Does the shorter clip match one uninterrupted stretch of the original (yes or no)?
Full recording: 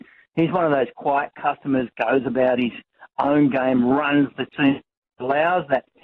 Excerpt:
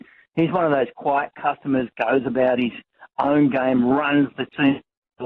yes